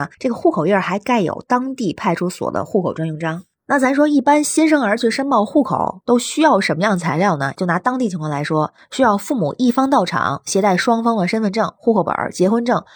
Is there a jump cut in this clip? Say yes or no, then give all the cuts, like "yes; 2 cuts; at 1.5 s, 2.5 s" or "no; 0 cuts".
no; 0 cuts